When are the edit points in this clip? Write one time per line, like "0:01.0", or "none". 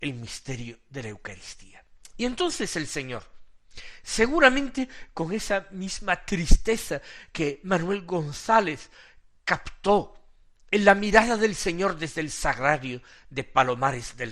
none

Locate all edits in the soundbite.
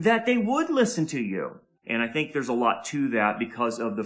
0:01.7

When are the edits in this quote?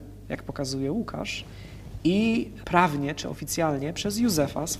0:02.6

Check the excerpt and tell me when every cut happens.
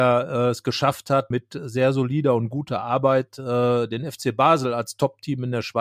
0:01.3

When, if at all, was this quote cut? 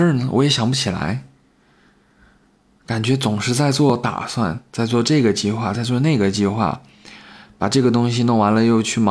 none

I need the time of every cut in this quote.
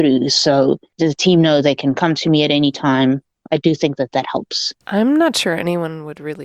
0:04.8

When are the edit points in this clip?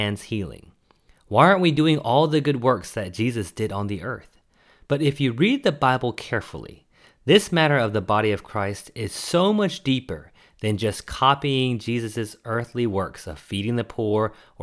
none

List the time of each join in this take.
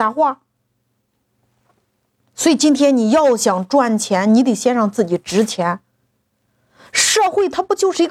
none

